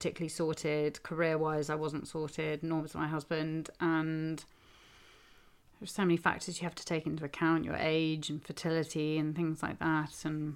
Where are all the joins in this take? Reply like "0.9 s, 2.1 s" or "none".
none